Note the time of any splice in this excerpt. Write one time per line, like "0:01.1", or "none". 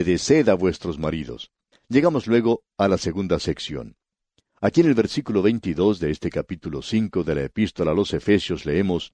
0:01.7